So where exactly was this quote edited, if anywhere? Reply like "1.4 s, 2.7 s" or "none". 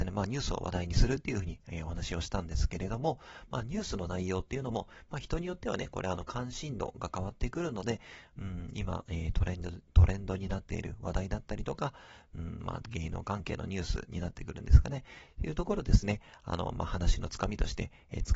none

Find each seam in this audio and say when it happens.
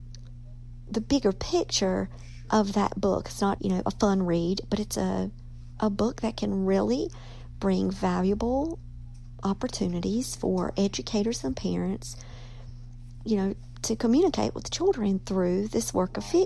3.6 s

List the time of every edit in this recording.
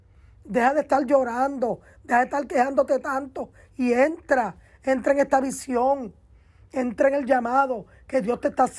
none

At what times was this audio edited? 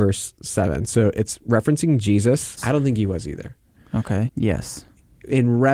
2.6 s, 4.3 s

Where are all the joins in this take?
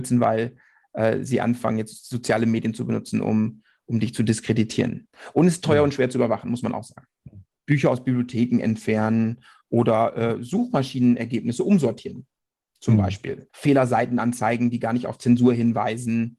7.5 s, 13.5 s

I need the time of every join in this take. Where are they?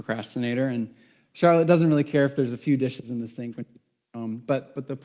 none

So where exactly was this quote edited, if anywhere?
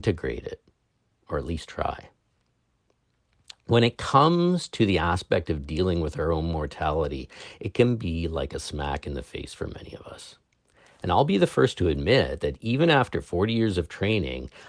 none

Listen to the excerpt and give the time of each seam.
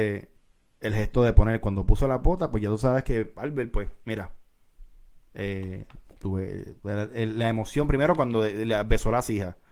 none

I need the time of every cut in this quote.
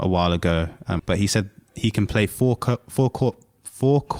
1.0 s

